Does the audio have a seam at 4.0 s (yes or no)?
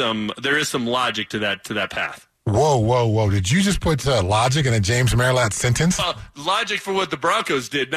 no